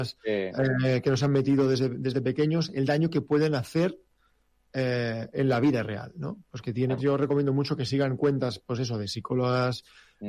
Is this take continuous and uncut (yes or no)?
no